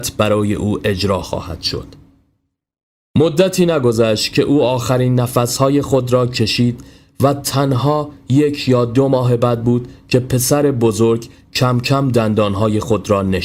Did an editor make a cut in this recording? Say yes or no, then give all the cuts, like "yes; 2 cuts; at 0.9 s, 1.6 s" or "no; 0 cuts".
no; 0 cuts